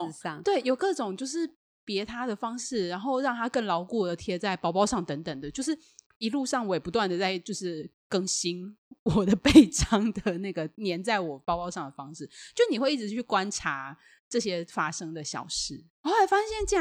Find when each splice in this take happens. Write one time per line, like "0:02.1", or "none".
0:15.9